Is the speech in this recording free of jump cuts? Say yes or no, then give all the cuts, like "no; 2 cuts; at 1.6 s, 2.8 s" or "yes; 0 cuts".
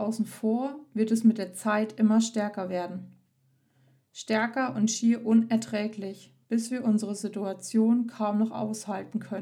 yes; 0 cuts